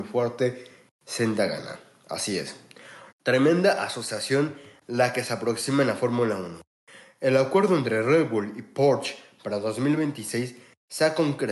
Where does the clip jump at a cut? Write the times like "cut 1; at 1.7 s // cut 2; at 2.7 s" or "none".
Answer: cut 1; at 3.1 s